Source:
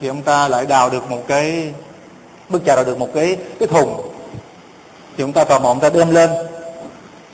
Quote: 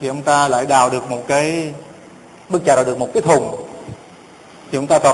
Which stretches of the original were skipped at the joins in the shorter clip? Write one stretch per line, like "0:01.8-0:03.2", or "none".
0:03.1-0:03.6